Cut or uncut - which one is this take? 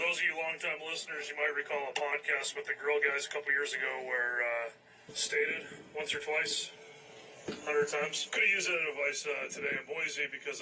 cut